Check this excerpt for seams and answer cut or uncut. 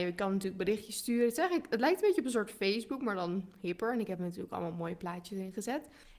uncut